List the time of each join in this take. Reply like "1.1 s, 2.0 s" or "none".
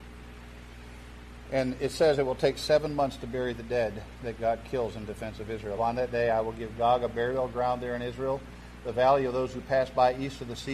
5.8 s

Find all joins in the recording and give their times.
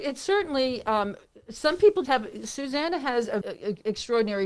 2.1 s, 3.4 s

